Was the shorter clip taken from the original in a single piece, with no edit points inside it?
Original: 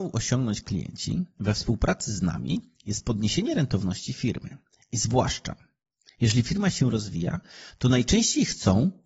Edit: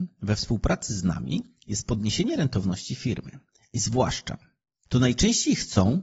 no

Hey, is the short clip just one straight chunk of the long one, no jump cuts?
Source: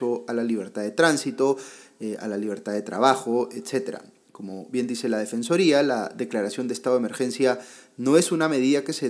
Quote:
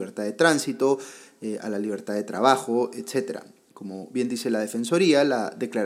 yes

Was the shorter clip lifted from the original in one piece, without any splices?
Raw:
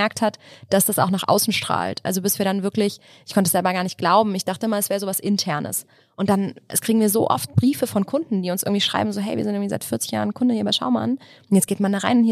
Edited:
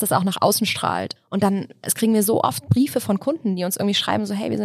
no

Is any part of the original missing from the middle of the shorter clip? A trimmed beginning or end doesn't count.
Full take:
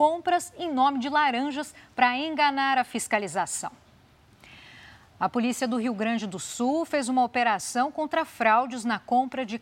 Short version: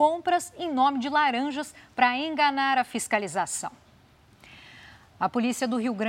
no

